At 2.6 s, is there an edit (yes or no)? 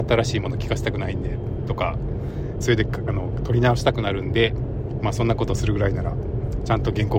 yes